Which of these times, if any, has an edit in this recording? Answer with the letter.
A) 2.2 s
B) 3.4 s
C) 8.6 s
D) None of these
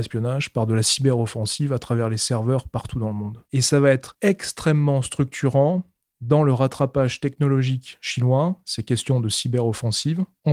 B